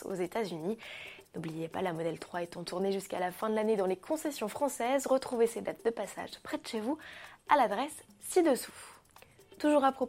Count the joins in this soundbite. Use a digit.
1